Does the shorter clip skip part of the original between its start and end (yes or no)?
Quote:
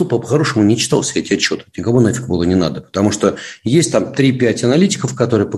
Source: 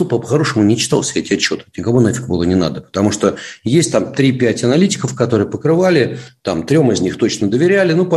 no